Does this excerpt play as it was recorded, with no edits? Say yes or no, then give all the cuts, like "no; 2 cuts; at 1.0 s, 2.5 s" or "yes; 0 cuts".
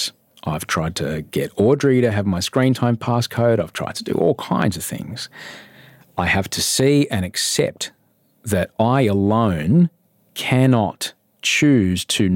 yes; 0 cuts